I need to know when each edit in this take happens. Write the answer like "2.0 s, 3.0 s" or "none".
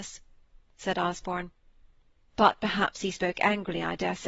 none